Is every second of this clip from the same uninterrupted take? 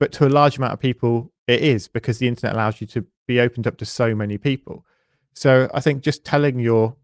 yes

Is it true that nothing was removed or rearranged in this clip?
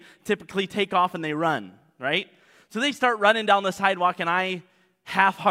yes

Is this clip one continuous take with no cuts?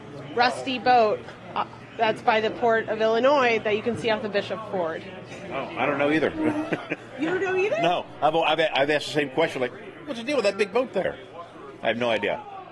yes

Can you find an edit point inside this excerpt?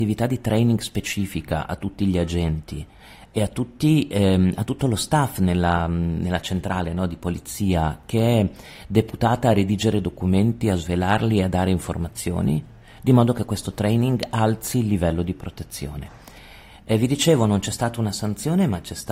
yes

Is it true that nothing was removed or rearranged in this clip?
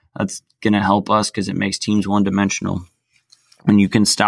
yes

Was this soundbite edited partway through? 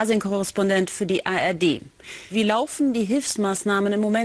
yes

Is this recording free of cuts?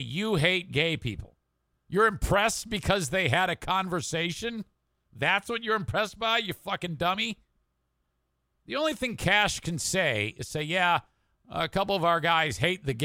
no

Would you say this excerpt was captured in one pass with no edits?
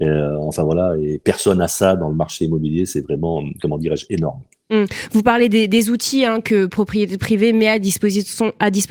yes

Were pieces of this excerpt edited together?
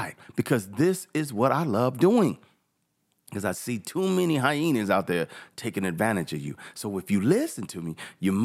no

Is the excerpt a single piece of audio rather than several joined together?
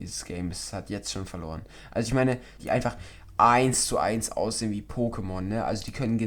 no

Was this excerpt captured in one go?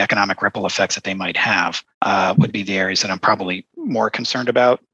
no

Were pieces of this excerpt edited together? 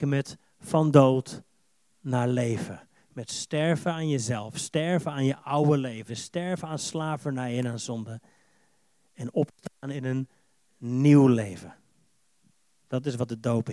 yes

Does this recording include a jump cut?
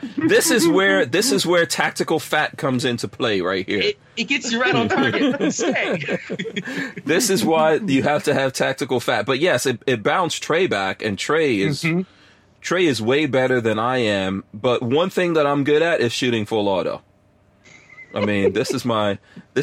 no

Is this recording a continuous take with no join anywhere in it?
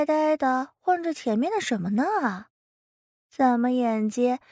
yes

